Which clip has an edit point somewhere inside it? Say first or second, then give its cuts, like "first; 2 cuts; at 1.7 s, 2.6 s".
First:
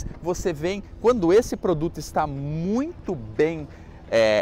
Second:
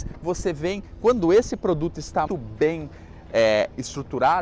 second; 1 cut; at 2.3 s